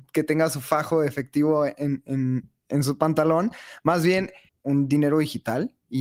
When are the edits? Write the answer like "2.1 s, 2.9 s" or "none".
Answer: 4.5 s